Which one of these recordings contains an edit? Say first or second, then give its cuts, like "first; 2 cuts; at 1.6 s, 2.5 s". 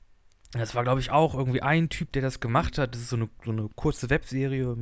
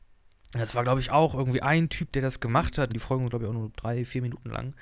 second; 1 cut; at 2.9 s